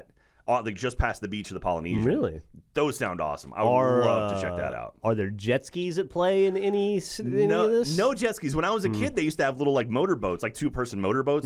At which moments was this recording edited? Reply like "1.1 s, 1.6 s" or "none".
none